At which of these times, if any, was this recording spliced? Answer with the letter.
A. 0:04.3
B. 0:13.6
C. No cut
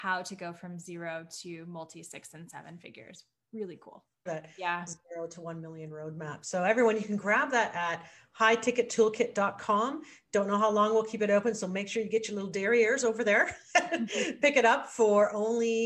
A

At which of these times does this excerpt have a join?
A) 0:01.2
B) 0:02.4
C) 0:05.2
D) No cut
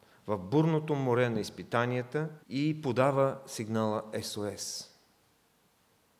B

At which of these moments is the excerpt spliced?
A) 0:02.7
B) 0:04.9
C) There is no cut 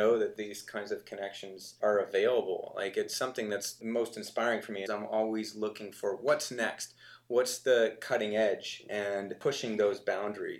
B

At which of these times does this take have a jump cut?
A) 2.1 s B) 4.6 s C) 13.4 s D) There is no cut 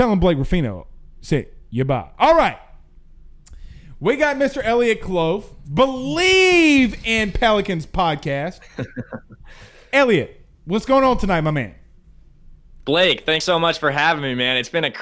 D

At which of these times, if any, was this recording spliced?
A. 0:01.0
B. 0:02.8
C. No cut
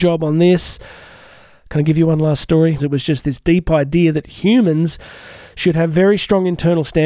B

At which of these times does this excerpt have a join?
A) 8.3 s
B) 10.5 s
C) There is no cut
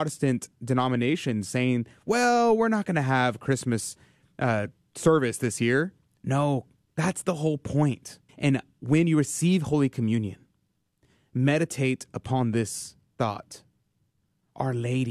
A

